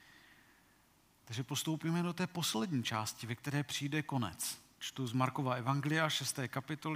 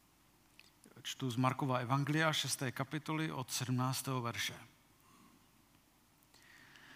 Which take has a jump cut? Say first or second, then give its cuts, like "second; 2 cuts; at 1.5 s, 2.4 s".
first; 1 cut; at 4.8 s